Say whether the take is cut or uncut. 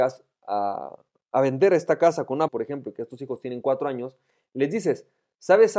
cut